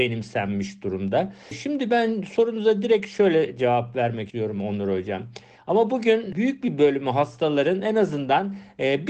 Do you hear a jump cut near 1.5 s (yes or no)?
no